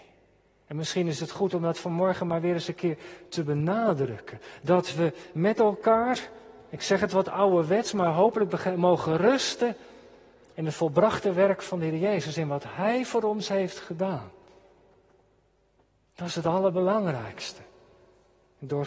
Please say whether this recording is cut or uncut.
uncut